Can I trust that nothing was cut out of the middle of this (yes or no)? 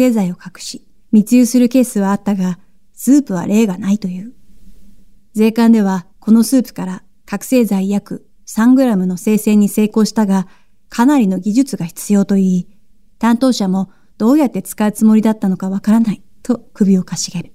yes